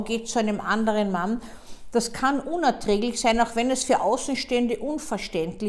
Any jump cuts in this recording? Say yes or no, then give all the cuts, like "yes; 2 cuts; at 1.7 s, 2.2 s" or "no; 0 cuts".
no; 0 cuts